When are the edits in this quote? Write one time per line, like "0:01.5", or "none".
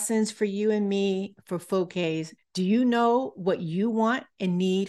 0:02.4